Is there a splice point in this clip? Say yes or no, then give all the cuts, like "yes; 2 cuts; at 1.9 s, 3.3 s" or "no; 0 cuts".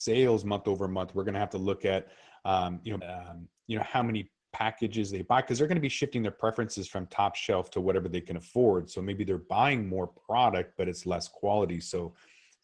yes; 1 cut; at 3.0 s